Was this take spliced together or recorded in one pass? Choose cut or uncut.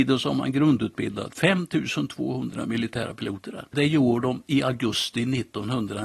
cut